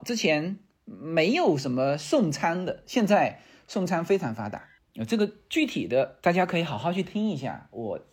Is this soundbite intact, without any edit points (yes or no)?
yes